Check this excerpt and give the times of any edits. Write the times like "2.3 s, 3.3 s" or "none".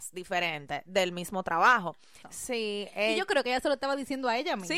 2.2 s